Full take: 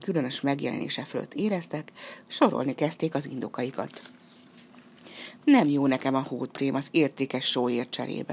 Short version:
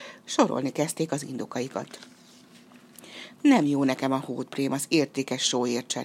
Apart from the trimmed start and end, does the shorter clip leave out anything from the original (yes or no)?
no